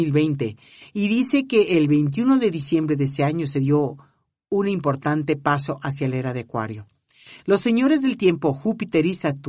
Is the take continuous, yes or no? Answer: yes